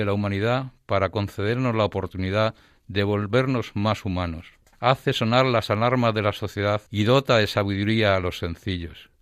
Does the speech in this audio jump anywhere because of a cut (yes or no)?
yes